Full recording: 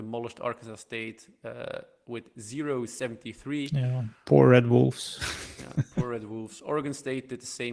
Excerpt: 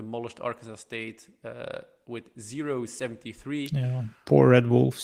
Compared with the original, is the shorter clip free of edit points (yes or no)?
yes